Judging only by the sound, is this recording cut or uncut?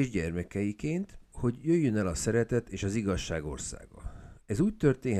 cut